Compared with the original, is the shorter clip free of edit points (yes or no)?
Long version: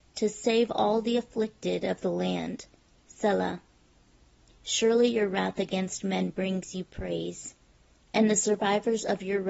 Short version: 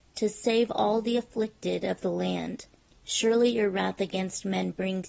no